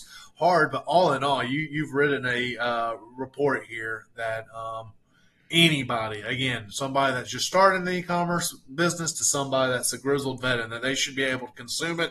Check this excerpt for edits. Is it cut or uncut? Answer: uncut